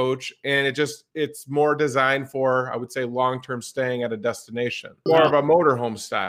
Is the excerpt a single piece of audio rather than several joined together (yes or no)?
no